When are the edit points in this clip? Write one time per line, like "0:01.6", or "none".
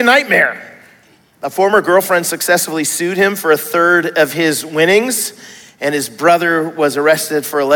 none